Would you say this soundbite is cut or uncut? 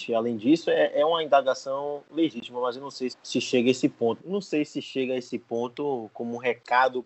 cut